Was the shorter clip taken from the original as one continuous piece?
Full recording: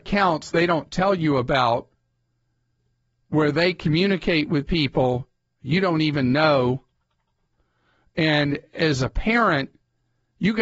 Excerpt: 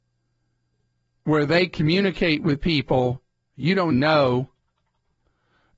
no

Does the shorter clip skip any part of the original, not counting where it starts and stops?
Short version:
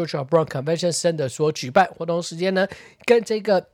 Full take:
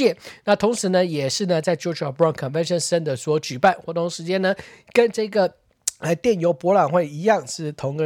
no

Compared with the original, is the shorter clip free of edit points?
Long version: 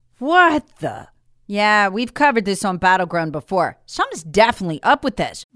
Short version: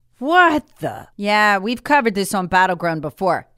no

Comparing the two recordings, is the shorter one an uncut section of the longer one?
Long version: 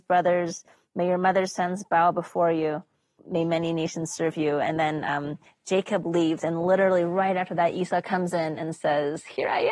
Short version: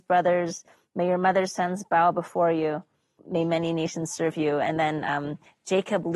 yes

